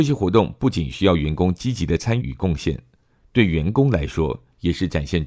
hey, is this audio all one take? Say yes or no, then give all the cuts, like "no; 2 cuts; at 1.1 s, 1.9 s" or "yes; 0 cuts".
no; 1 cut; at 2.2 s